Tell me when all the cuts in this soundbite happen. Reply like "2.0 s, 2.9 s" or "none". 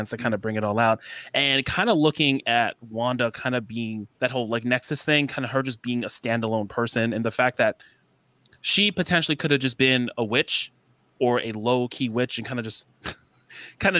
4.1 s